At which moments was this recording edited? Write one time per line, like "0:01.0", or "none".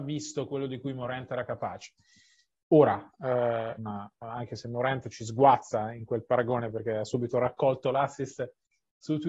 0:03.8

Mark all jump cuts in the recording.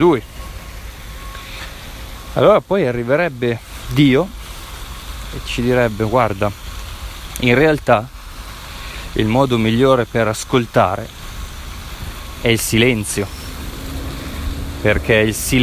none

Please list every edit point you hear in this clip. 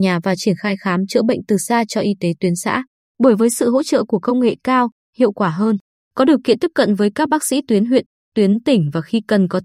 0:03.0
0:05.1

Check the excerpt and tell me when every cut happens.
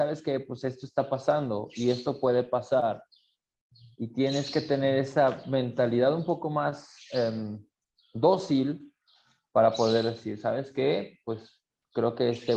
none

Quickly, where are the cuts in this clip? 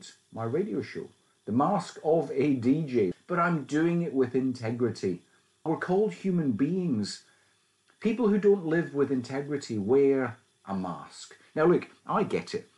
0:03.1
0:05.7

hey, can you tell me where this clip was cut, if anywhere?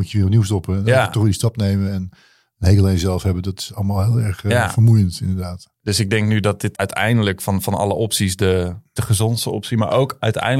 0:06.7
0:09.0

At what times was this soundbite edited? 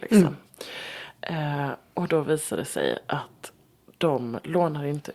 none

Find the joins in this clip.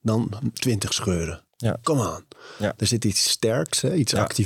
none

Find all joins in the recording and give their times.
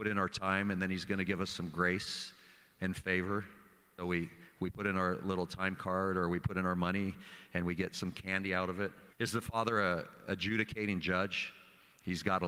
0:04.0
0:09.1

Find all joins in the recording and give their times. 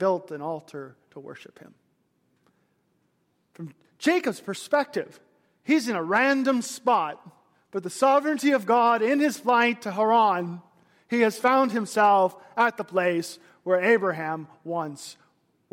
none

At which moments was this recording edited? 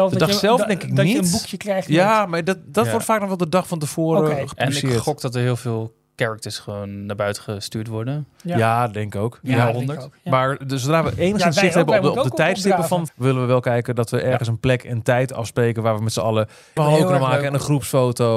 0:13.1
0:16.8

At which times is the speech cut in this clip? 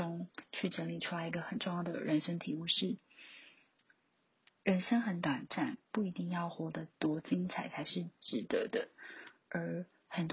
none

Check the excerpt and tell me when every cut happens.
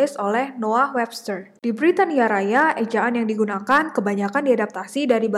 0:01.6

